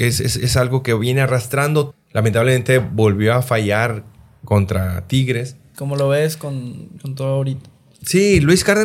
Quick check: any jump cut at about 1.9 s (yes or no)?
yes